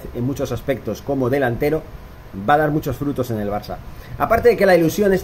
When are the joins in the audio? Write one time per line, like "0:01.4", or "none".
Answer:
none